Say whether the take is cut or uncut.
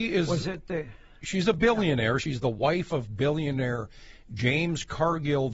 uncut